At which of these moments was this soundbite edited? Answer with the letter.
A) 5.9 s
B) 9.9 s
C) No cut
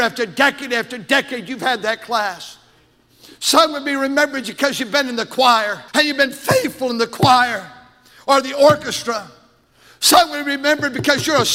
A